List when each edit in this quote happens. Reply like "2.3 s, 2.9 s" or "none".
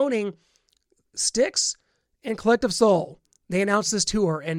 none